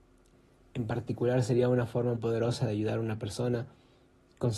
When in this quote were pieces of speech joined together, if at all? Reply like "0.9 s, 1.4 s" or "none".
2.1 s